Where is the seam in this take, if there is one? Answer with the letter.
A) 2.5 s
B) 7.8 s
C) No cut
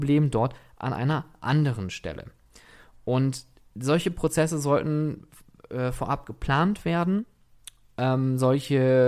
C